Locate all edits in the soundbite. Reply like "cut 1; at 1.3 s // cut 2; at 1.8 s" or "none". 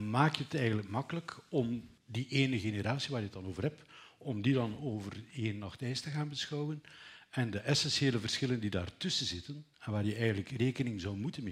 cut 1; at 2.0 s // cut 2; at 9.7 s